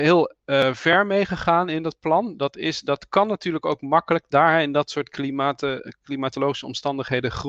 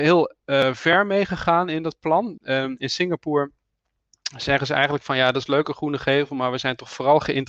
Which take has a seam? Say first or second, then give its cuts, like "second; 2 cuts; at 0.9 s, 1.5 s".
second; 1 cut; at 2.4 s